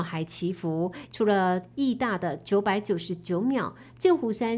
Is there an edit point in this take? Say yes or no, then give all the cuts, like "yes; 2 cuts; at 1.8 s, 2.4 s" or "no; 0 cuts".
yes; 1 cut; at 1.1 s